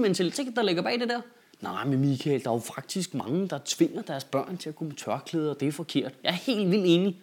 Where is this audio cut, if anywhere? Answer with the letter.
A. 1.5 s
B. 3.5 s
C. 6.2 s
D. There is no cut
C